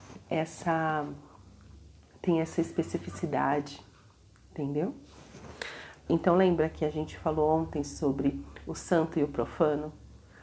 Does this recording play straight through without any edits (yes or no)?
no